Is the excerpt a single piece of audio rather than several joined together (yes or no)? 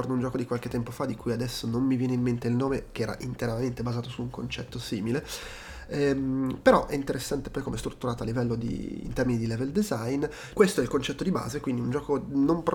no